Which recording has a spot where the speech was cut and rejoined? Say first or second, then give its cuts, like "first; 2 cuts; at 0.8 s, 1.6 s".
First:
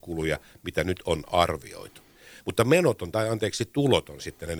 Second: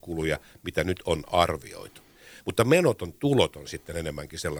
second; 1 cut; at 3.1 s